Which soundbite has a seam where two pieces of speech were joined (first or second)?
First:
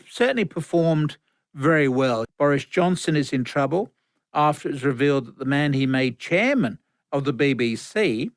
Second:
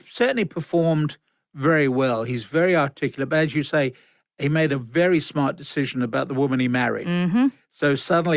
first